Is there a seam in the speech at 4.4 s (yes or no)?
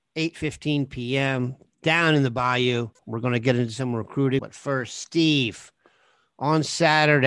yes